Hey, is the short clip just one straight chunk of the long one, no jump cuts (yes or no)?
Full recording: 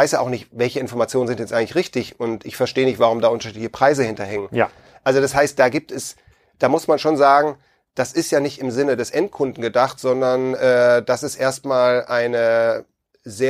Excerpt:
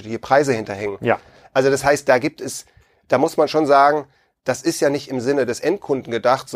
yes